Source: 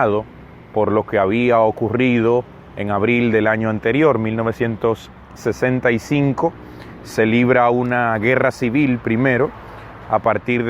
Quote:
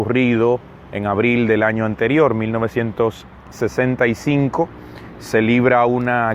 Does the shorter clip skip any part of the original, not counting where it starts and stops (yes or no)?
no